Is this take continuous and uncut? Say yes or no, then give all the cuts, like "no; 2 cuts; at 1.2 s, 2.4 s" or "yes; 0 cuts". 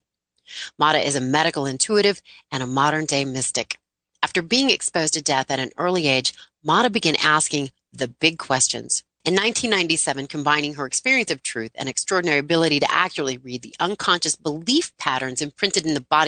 no; 1 cut; at 9.2 s